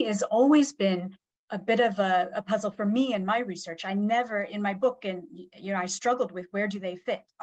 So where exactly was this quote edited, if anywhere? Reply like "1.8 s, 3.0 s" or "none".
none